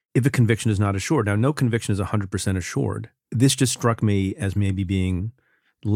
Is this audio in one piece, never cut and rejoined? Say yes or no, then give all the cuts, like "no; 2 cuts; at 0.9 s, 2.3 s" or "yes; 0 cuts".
no; 1 cut; at 3.2 s